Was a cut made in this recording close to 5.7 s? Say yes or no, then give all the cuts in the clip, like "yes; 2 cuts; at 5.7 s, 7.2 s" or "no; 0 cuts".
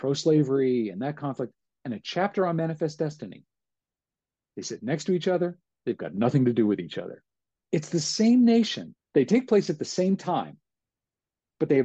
no; 2 cuts; at 7.6 s, 9.0 s